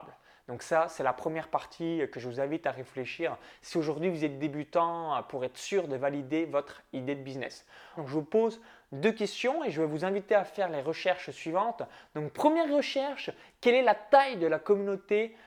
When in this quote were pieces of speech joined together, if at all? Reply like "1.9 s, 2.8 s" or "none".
8.0 s